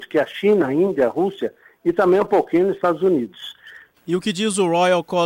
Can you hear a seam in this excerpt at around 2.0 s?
no; 1 cut; at 3.9 s

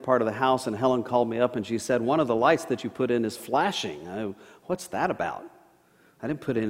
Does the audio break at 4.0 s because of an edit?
no; 0 cuts

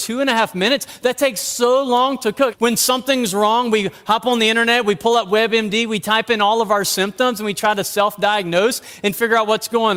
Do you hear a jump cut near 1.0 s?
no; 1 cut; at 2.5 s

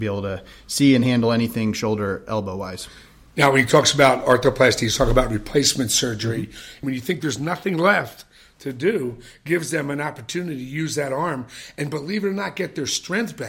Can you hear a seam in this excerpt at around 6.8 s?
yes; 1 cut; at 6.8 s

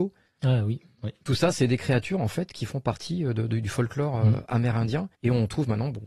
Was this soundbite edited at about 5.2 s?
yes; 1 cut; at 5.2 s

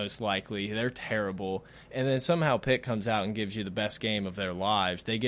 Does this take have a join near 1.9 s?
no; 0 cuts

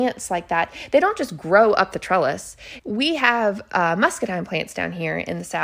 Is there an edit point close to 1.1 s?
no; 1 cut; at 2.8 s

